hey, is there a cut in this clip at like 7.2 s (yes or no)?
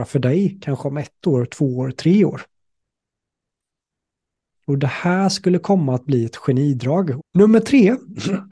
yes